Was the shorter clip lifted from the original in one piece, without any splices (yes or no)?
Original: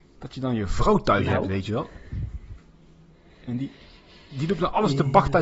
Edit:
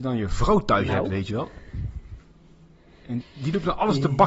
no